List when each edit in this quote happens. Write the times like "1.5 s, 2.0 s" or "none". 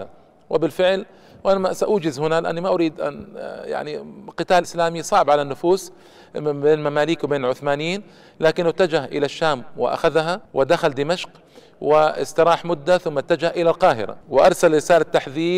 4.6 s, 10.4 s, 14.2 s